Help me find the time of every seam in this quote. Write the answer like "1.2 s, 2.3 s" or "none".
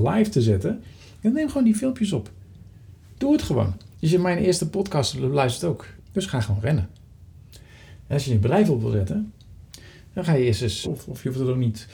3.9 s, 6.0 s, 10.8 s

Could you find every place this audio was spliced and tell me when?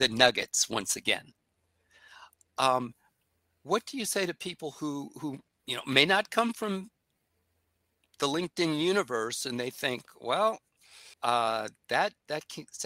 2.5 s, 11.1 s

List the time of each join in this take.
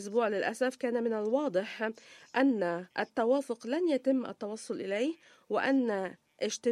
2.9 s

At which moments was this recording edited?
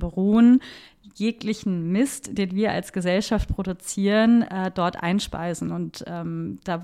none

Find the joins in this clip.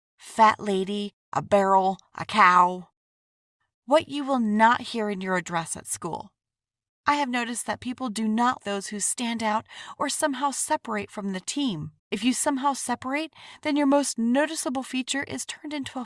8.6 s, 12.0 s

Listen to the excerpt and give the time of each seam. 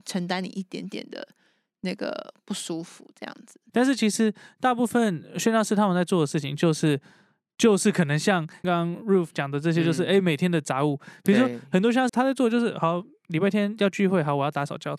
3.7 s, 8.6 s, 12.1 s

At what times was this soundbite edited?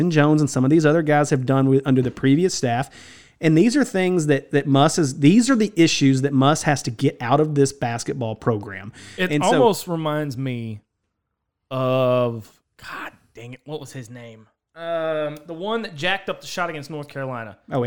none

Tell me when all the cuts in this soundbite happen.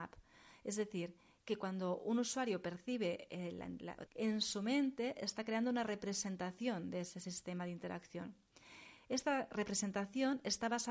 4.1 s

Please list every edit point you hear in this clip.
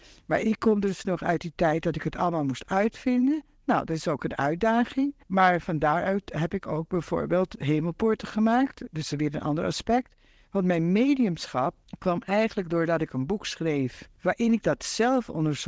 none

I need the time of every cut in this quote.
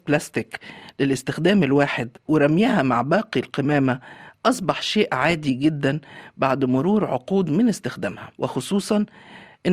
8.3 s

